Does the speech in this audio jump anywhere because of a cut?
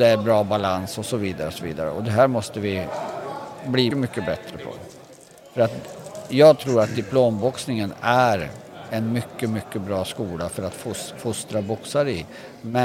yes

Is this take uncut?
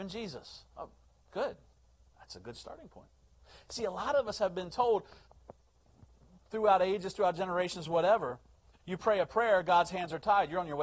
yes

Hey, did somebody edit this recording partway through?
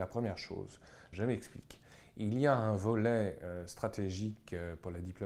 yes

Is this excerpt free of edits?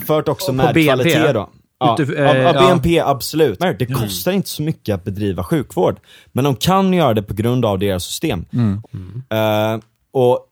no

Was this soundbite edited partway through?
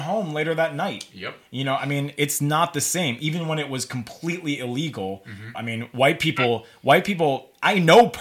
yes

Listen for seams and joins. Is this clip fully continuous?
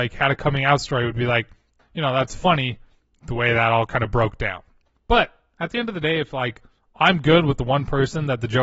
no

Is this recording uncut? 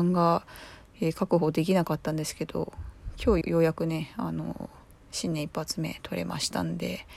no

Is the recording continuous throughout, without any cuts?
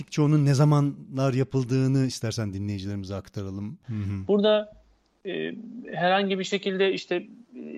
no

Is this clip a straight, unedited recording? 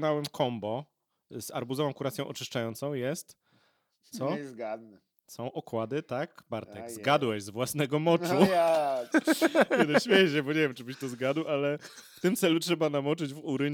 no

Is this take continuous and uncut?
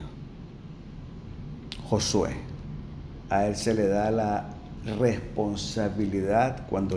no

